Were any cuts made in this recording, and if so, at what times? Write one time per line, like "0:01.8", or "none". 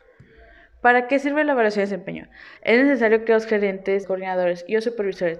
0:02.6
0:04.0